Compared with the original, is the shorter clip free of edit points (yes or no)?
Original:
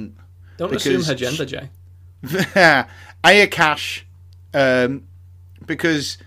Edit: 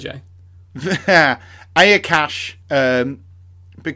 no